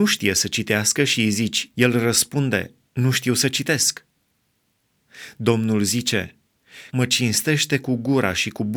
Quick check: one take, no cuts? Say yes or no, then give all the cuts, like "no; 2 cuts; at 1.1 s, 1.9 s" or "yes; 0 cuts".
no; 2 cuts; at 1.7 s, 6.9 s